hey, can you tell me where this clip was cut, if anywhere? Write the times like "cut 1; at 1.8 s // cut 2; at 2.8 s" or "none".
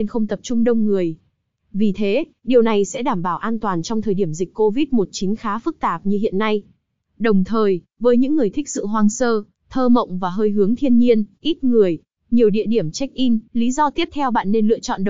cut 1; at 12.2 s // cut 2; at 13.5 s